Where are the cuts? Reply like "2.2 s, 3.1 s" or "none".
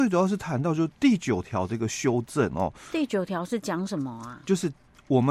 none